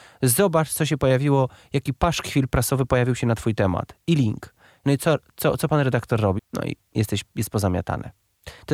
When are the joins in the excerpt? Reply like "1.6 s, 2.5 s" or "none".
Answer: 6.4 s